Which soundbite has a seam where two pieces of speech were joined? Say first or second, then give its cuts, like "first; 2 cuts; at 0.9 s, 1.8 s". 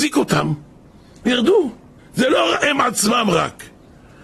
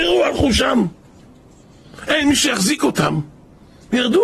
first; 1 cut; at 2.0 s